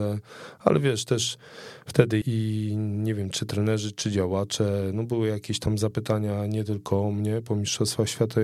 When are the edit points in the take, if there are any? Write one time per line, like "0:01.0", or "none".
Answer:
0:02.2